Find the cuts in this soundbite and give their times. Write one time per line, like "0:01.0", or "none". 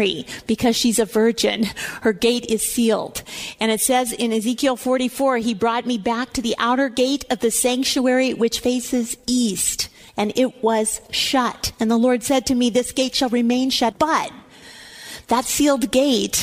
0:13.9